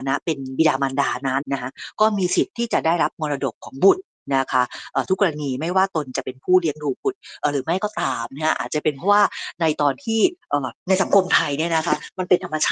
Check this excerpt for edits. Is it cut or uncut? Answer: cut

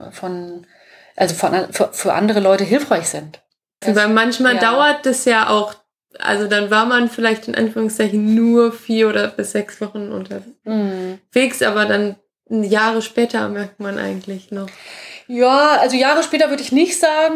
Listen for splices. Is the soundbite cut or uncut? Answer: cut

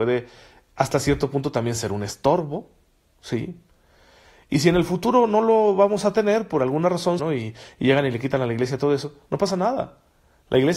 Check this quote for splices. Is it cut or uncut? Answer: cut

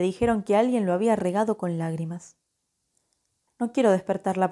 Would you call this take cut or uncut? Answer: cut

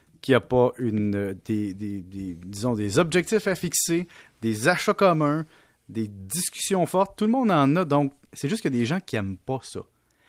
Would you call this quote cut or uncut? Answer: uncut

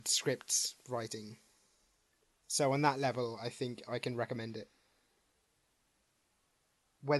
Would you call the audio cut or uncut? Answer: uncut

